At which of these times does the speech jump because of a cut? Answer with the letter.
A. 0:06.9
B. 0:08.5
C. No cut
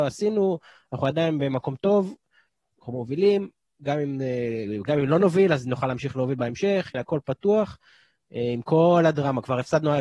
A